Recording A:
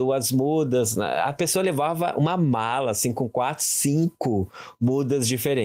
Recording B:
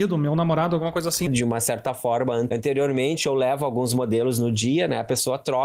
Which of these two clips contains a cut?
B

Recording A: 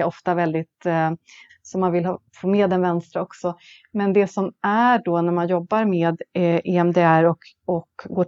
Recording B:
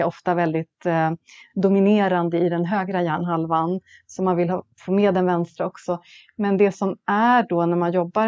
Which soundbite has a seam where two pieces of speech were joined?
A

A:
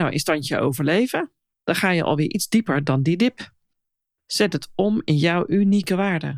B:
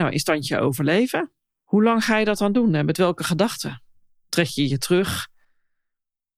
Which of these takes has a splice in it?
A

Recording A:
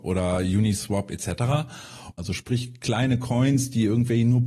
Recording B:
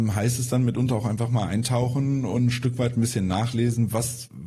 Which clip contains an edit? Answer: A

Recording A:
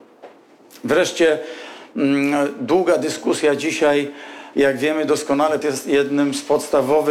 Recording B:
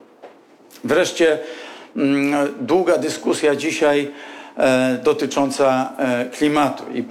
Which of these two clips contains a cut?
A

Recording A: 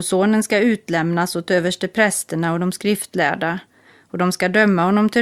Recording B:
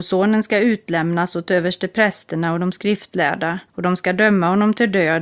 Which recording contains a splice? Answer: B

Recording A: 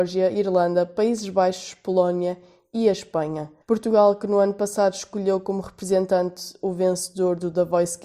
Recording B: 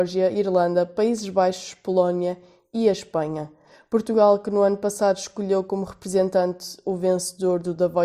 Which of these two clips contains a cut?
A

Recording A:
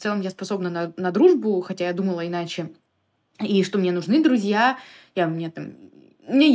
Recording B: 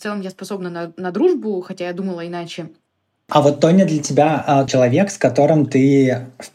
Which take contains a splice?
B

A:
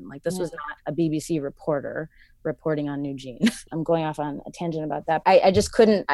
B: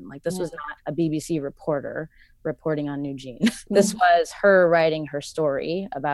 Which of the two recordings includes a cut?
A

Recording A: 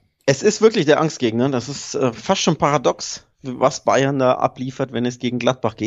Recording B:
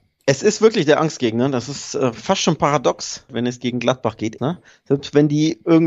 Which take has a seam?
B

